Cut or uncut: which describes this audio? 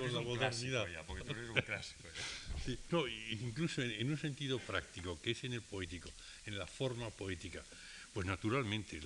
cut